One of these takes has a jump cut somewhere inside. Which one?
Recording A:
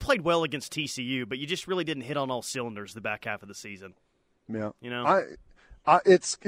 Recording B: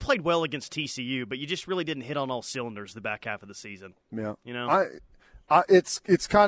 B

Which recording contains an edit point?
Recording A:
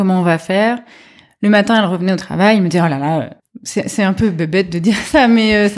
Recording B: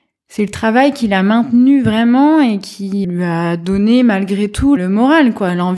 B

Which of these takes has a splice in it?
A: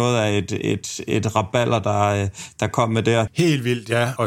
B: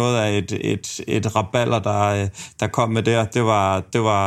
A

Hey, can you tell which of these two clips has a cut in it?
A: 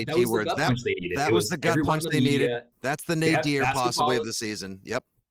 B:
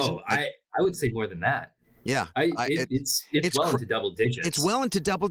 A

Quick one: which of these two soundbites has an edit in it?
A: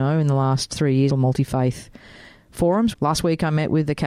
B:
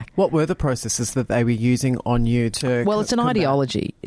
A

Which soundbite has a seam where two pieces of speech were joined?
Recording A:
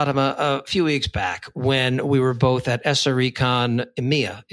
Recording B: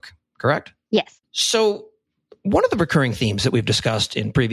B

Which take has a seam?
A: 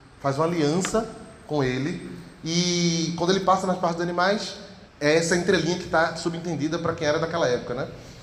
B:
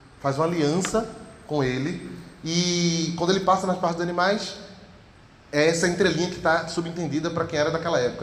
A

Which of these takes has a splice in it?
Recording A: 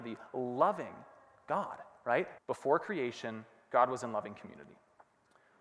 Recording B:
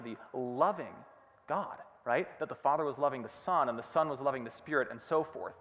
A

